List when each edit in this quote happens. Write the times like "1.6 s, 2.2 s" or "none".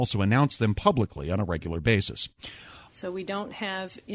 2.9 s